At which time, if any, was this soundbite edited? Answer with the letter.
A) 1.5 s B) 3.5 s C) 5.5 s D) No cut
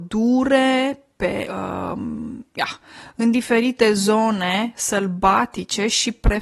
A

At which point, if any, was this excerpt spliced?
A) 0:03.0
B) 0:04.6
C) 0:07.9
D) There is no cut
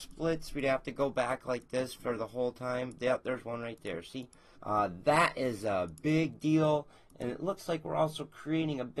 B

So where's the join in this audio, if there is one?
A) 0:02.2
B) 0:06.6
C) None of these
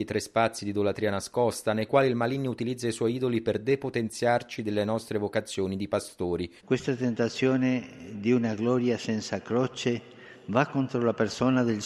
B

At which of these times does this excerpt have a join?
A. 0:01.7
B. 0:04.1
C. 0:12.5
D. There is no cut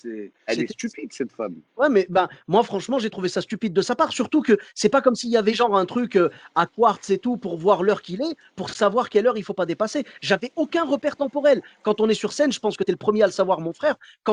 A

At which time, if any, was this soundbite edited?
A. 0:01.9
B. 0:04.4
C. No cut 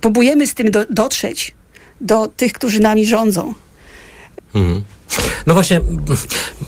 B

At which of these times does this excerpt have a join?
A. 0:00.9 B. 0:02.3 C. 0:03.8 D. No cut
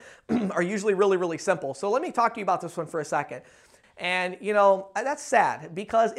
C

